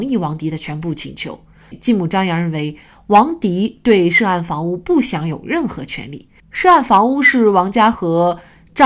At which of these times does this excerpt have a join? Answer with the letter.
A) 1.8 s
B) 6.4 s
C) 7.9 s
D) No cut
C